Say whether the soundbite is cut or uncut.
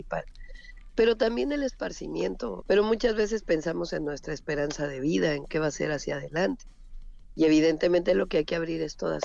cut